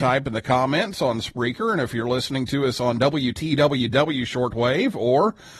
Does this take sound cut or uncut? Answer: uncut